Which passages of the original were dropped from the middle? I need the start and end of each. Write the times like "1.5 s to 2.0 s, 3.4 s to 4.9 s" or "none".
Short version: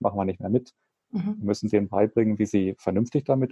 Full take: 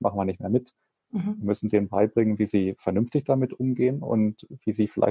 none